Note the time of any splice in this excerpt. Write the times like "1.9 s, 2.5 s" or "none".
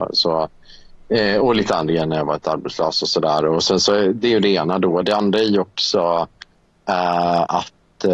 none